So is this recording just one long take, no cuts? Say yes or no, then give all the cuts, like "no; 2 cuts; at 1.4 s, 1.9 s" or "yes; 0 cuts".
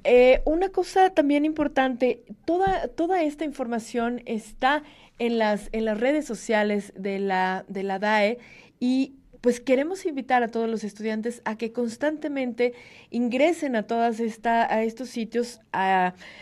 yes; 0 cuts